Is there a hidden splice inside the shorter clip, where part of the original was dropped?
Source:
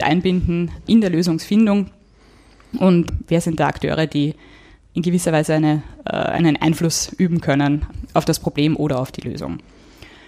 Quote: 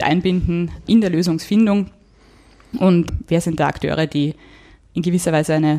no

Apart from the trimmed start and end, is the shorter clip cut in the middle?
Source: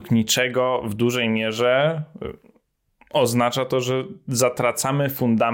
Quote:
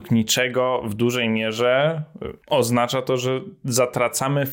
yes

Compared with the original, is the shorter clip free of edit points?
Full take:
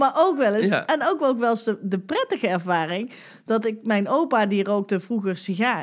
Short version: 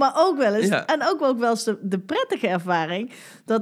yes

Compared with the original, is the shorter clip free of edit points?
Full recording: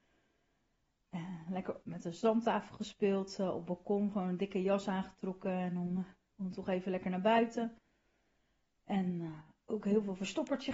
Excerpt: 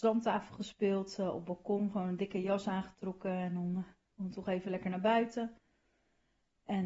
yes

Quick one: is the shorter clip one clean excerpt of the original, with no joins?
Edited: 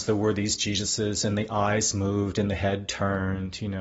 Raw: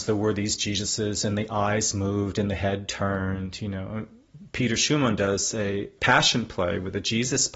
yes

